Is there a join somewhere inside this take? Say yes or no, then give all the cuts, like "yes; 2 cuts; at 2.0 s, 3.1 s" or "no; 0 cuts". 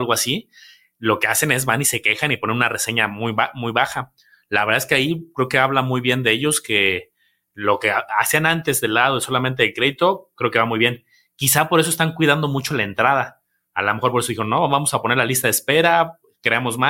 no; 0 cuts